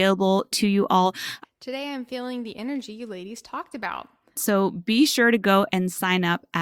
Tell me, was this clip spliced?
yes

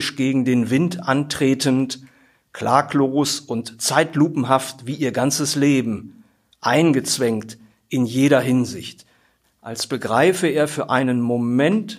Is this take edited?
yes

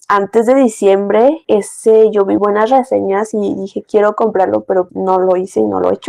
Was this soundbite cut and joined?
yes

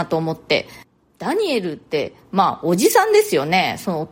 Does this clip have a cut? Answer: no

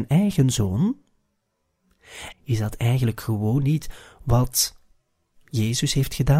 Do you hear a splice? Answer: yes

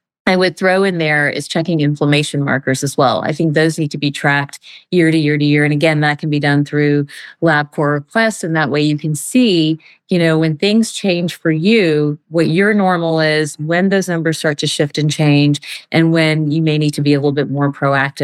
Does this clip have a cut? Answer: no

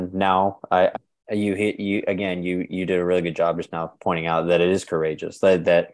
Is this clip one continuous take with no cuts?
no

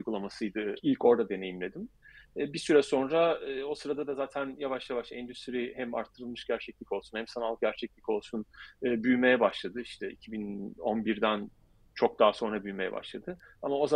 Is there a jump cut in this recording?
no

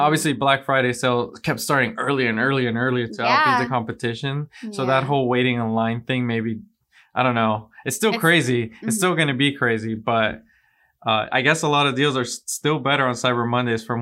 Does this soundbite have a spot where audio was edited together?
no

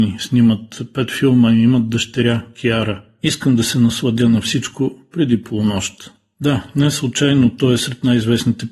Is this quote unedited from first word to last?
no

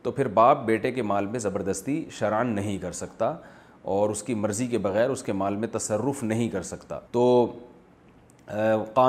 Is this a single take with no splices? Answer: no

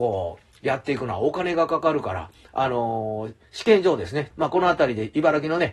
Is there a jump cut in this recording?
yes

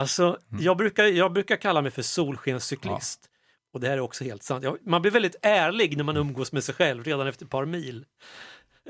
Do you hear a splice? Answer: yes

